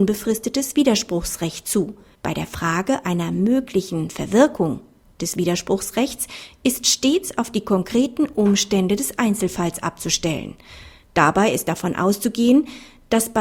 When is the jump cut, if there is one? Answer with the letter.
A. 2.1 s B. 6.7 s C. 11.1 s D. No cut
A